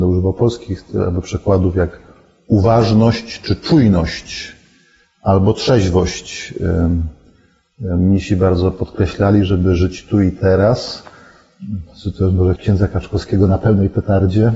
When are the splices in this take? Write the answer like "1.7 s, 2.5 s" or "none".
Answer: 12.6 s